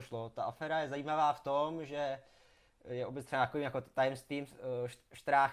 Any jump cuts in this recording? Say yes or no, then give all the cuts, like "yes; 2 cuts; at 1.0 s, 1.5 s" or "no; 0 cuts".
no; 0 cuts